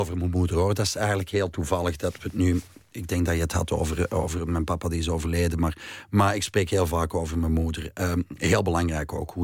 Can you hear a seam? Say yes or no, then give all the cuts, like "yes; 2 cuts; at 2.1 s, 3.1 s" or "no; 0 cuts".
no; 0 cuts